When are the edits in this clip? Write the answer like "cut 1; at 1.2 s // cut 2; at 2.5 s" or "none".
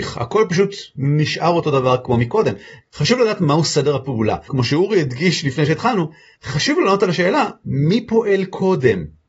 cut 1; at 2.8 s // cut 2; at 4.5 s